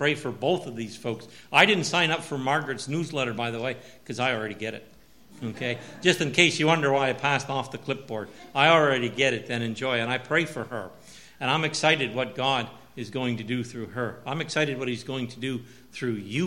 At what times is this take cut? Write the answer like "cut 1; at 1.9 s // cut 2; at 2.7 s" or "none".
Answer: none